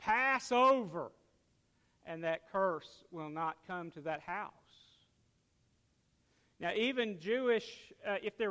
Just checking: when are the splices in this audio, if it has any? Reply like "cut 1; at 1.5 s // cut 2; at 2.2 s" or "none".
none